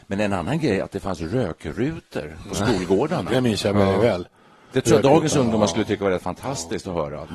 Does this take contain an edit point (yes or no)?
no